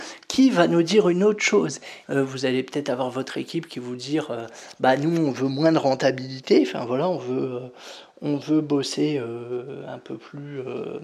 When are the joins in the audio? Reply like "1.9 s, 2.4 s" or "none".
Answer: 2.0 s

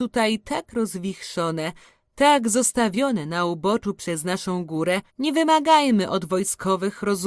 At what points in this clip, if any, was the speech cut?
5.1 s

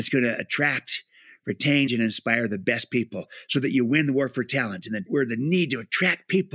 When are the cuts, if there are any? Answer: 1.9 s, 5.1 s

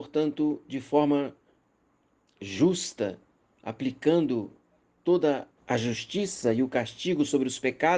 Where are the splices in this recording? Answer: 5.6 s

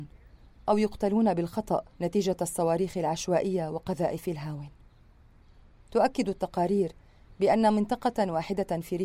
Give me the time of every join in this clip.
1.9 s

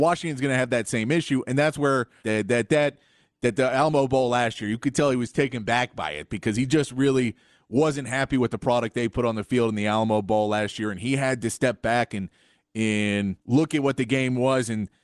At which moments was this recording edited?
2.2 s, 13.4 s

